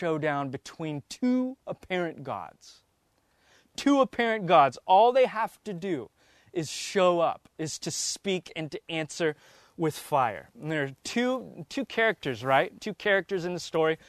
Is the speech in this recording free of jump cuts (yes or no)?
no